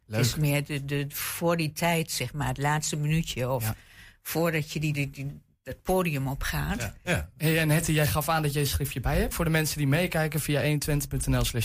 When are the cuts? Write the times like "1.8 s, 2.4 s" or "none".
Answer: 4.9 s, 7.0 s, 9.3 s